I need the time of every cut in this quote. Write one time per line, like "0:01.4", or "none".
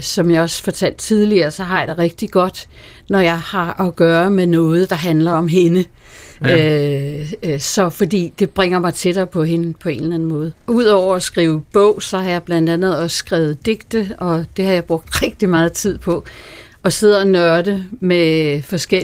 none